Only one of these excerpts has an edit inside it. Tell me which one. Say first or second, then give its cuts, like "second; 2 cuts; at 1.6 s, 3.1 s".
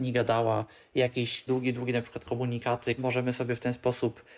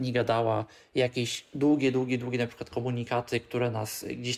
first; 2 cuts; at 1.5 s, 3.0 s